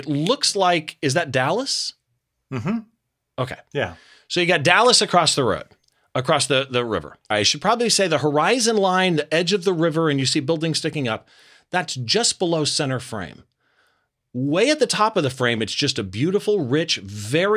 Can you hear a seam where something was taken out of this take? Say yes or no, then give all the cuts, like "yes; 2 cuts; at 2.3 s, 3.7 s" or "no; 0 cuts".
yes; 1 cut; at 7.3 s